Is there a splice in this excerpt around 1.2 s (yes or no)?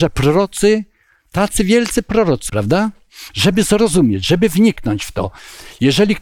no